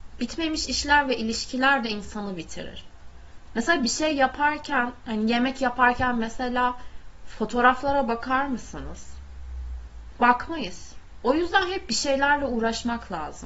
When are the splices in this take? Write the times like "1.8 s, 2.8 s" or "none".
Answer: 3.5 s